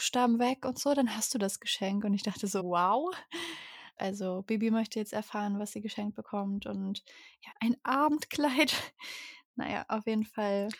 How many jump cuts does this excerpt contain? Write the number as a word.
three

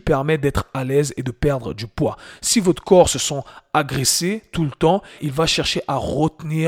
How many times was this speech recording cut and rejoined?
one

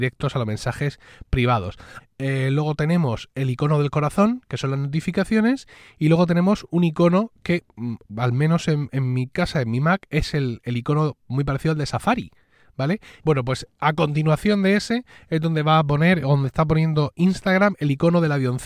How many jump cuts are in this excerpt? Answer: two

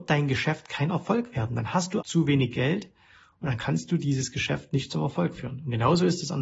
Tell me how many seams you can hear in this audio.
one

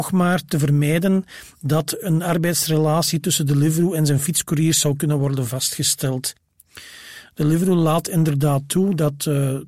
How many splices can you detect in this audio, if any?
one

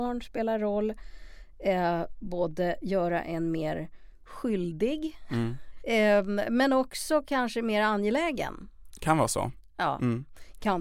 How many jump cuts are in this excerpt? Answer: zero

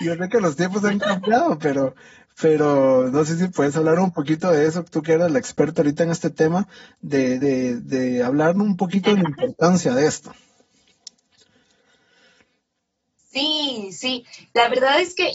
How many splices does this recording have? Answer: zero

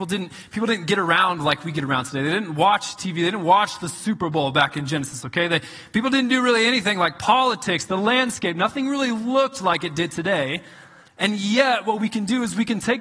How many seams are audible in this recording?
zero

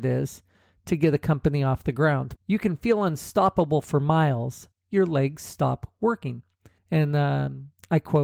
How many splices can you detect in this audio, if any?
three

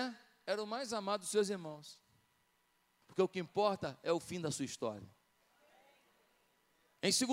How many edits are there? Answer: one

